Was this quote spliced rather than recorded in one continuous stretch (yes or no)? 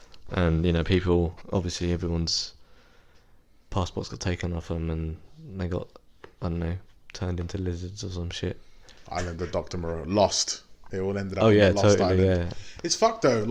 no